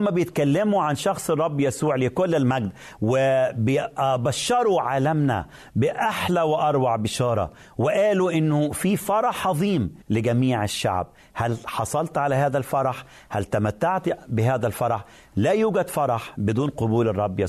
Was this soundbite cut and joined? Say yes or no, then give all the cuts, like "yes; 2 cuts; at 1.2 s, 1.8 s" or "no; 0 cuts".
yes; 1 cut; at 10.0 s